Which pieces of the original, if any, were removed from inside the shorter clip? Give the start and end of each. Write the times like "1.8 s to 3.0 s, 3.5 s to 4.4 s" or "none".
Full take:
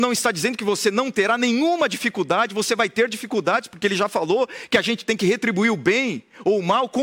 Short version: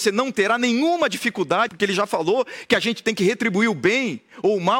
2.5 s to 3.7 s